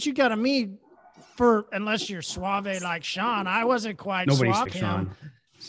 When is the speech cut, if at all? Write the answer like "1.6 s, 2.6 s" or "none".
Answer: 4.7 s